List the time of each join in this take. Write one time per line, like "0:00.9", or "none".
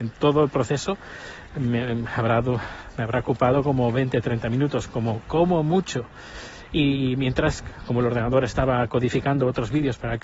none